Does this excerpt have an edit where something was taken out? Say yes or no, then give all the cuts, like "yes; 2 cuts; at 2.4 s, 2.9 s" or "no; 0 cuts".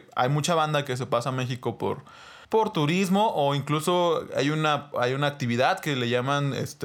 yes; 1 cut; at 2.4 s